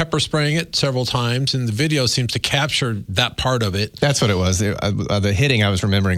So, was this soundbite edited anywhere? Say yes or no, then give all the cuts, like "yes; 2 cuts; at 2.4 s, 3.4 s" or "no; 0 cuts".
no; 0 cuts